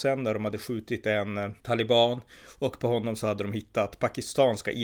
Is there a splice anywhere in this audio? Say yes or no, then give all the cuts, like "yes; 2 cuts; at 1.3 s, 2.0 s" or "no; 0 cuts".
yes; 1 cut; at 1.6 s